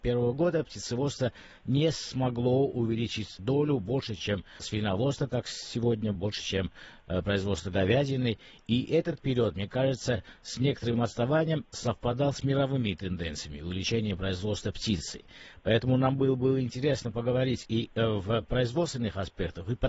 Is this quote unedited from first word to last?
yes; 0 cuts

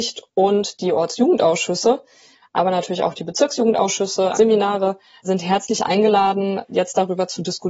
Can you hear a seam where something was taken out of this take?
yes; 1 cut; at 4.3 s

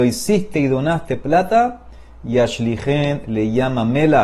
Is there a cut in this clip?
no; 0 cuts

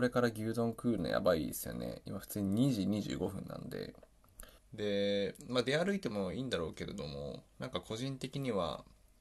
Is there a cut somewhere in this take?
yes; 1 cut; at 4.6 s

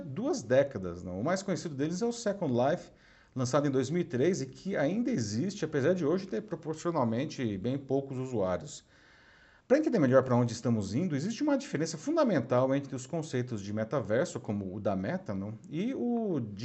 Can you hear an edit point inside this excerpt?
yes; 1 cut; at 9.6 s

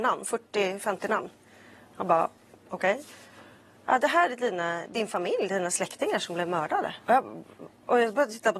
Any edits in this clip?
yes; 1 cut; at 7.0 s

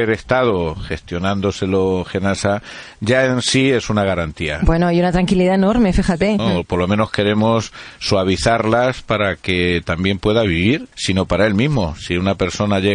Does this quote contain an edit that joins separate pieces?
yes; 2 cuts; at 6.4 s, 10.9 s

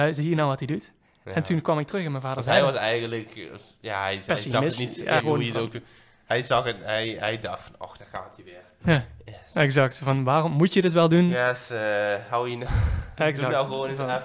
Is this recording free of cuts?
no; 1 cut; at 5.2 s

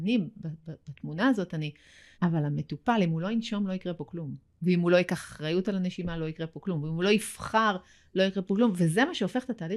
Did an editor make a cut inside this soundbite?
yes; 1 cut; at 2.1 s

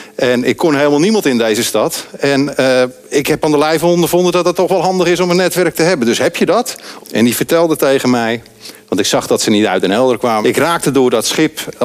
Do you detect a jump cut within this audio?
yes; 2 cuts; at 7.0 s, 10.4 s

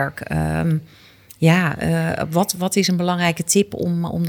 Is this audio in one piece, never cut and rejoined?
yes; 0 cuts

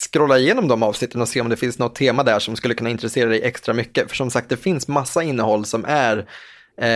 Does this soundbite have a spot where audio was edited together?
no; 0 cuts

